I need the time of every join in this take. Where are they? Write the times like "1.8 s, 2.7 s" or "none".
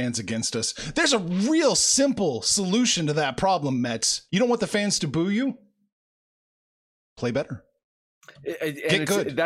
4.3 s